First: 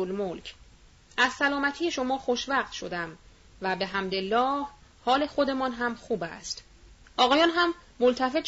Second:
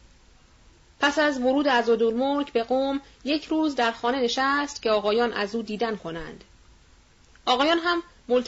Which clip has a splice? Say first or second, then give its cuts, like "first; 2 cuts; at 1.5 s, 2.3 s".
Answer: first; 2 cuts; at 1.0 s, 7.0 s